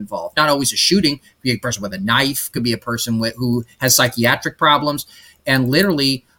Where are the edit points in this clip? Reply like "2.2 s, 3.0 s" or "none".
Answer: none

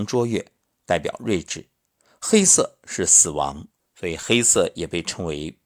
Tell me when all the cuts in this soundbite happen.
3.8 s

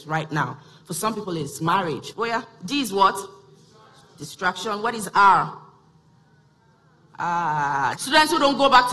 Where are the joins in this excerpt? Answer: 2.1 s, 8.0 s

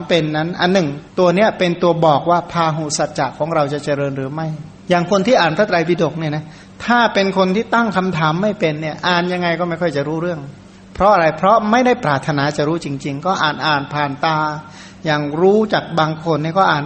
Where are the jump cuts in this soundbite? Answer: 1.1 s, 4.8 s

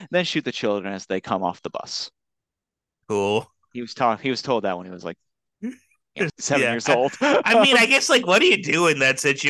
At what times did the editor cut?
6.3 s

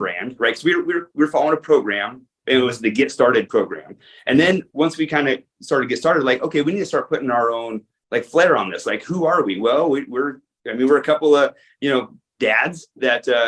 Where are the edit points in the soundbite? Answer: none

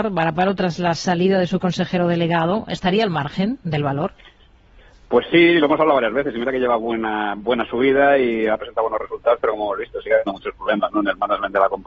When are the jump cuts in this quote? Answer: none

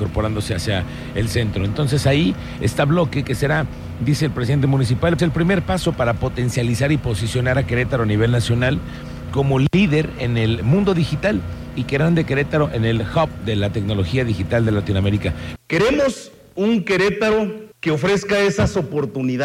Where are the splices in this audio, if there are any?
5.2 s, 15.6 s, 17.7 s

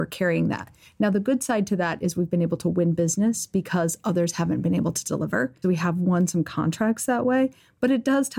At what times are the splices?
5.6 s

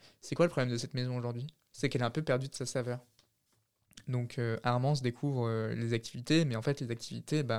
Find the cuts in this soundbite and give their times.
none

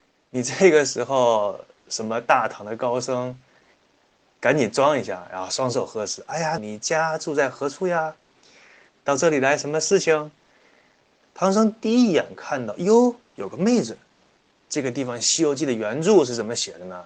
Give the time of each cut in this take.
6.6 s, 11.2 s

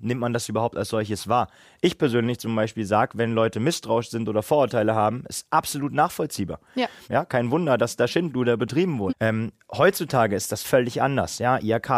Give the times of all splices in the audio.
7.0 s, 9.1 s

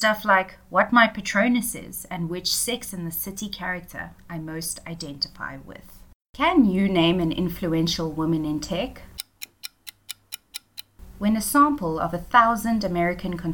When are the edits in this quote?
none

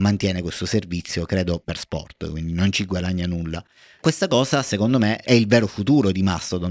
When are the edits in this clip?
none

